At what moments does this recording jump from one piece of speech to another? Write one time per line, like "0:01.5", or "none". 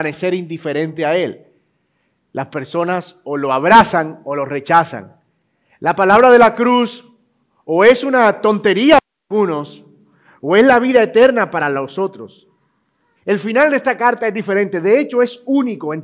0:05.7
0:13.2